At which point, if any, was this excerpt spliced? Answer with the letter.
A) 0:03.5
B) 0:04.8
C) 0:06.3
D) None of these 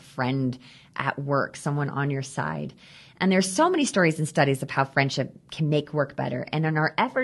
D